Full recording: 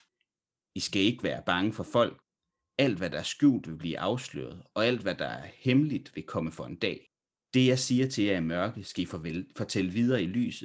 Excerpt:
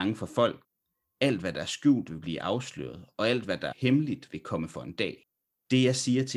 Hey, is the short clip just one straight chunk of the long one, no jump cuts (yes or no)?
no